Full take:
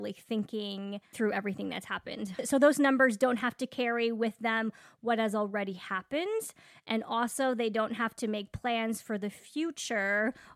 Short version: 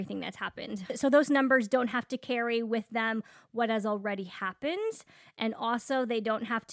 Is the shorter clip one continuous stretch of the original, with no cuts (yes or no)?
yes